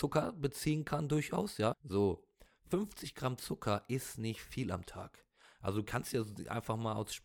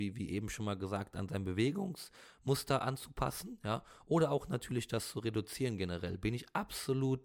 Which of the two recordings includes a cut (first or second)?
first